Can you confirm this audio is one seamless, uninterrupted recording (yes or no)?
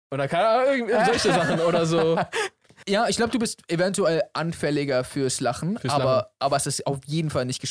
yes